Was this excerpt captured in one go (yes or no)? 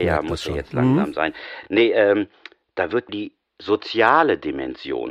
yes